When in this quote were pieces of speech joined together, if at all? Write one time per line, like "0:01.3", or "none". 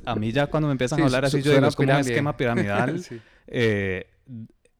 none